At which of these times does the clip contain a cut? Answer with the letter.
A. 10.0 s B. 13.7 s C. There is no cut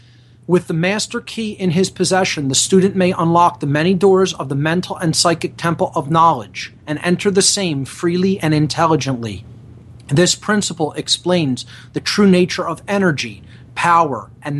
C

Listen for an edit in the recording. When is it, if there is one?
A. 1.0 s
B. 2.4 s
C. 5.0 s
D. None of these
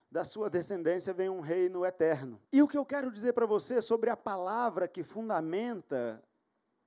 B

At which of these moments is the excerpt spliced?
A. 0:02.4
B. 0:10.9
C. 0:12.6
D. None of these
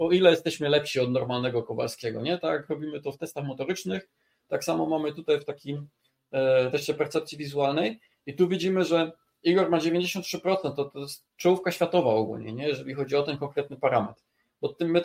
D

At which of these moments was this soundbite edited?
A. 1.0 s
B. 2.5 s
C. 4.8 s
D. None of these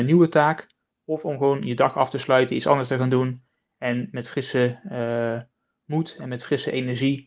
D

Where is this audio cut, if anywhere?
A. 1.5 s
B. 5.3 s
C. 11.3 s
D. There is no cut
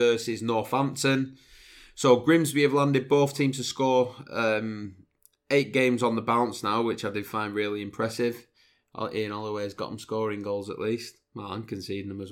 D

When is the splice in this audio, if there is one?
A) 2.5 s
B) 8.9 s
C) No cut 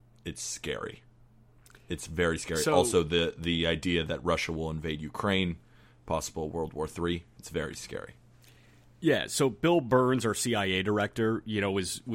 C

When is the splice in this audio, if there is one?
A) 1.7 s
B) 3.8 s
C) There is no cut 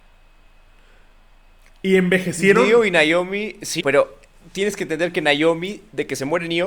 B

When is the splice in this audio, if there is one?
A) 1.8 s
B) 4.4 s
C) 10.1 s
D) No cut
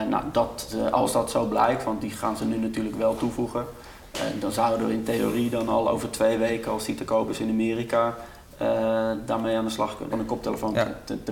C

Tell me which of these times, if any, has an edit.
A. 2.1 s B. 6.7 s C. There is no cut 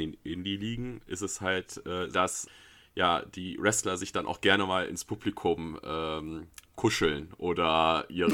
A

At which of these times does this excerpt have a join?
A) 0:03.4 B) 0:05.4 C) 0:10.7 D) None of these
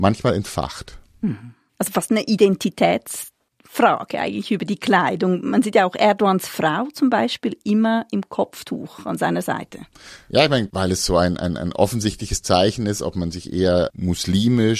C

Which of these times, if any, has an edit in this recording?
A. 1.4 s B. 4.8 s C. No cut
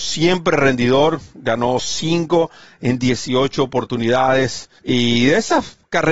B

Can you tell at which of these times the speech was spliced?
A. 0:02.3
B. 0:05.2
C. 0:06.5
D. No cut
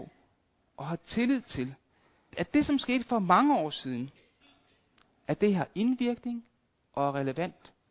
A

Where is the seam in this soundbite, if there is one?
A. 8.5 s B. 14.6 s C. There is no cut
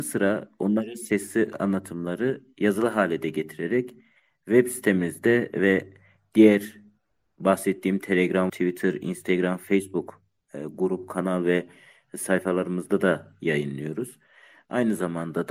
A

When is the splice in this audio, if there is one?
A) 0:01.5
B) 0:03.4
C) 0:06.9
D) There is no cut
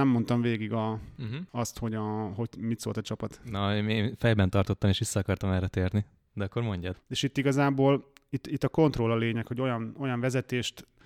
C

